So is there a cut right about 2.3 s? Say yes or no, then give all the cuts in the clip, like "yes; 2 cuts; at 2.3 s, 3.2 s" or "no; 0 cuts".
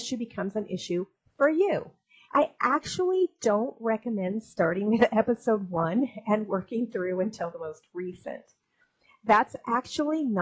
yes; 1 cut; at 2.3 s